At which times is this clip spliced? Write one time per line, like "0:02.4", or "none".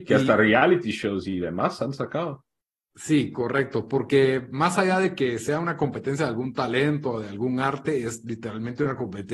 none